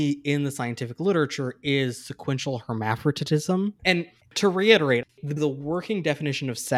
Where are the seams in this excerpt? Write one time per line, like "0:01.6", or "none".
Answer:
0:03.8
0:05.4